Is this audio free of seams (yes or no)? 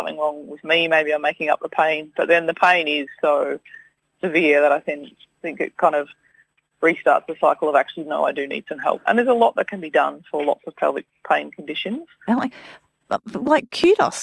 no